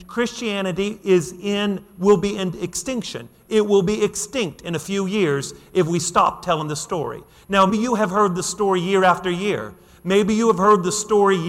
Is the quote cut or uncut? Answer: cut